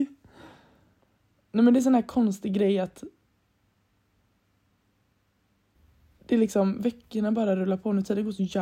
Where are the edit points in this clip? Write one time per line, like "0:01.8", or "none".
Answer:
none